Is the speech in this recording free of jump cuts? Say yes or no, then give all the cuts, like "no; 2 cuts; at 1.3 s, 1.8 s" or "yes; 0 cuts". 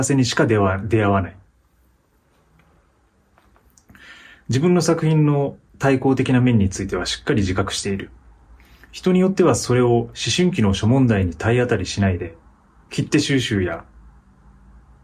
yes; 0 cuts